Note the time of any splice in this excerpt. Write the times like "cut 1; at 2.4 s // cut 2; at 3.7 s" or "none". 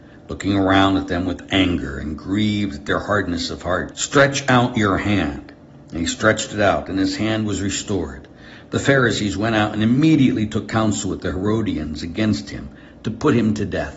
cut 1; at 3.9 s